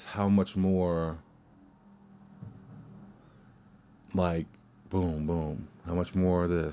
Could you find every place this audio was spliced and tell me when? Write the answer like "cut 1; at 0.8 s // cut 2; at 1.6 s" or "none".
none